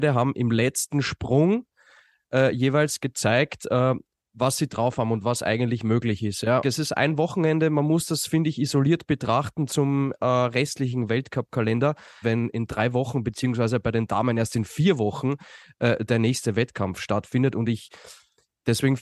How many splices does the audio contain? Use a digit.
3